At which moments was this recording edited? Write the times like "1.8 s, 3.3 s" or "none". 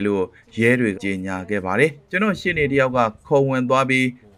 0.9 s